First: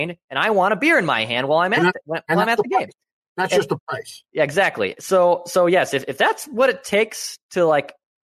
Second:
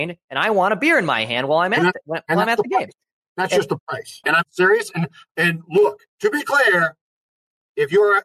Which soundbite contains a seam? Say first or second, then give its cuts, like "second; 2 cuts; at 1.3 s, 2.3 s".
second; 2 cuts; at 4.2 s, 6.1 s